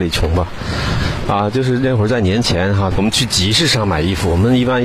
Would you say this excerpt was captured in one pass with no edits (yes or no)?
no